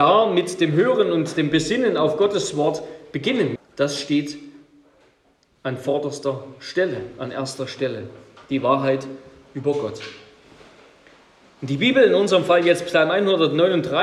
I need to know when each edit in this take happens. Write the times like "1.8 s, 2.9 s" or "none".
3.6 s